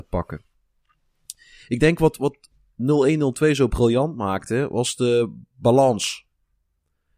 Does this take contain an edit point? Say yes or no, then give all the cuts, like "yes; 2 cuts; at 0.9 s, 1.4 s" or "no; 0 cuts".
no; 0 cuts